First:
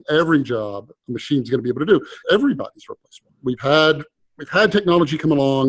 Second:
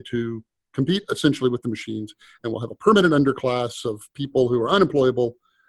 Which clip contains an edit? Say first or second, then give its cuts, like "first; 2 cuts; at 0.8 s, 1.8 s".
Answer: first; 2 cuts; at 2.2 s, 3.3 s